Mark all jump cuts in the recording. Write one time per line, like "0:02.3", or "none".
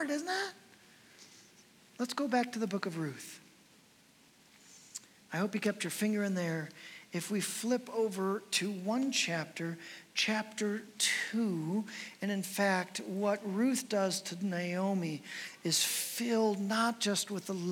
none